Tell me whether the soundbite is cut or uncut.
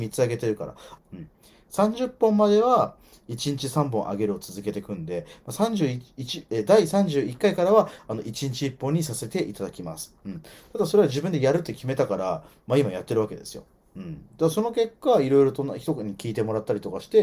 cut